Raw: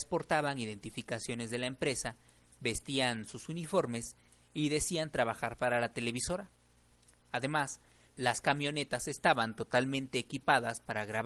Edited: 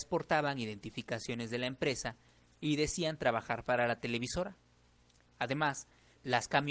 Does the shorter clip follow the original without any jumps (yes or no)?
no